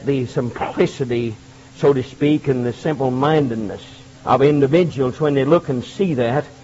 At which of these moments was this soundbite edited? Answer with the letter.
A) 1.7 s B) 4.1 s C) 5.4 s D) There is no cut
B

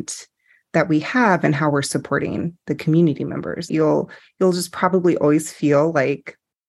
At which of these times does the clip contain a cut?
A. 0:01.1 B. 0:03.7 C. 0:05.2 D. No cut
B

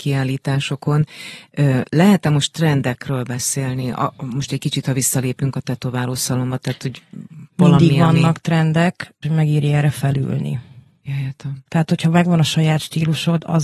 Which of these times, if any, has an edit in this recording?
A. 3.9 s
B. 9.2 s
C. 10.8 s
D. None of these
B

